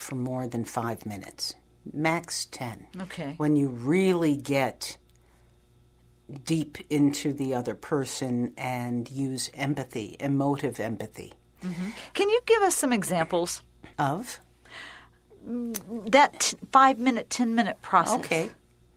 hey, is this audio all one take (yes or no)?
no